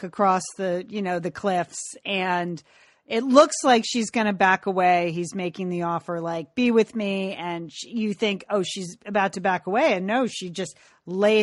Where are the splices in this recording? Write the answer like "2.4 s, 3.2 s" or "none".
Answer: none